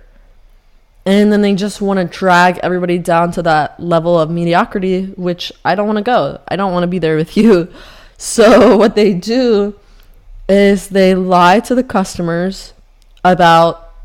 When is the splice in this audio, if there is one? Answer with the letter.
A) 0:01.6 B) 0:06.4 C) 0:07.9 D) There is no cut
D